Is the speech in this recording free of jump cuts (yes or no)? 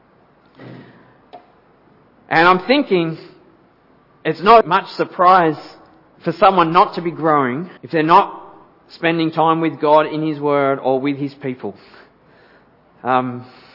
no